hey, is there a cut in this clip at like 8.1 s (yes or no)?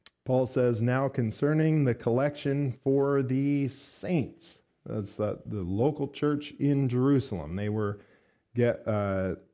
no